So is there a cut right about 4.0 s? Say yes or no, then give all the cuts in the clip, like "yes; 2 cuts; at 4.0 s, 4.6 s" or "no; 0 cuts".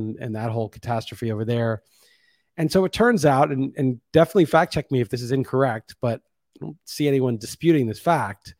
no; 0 cuts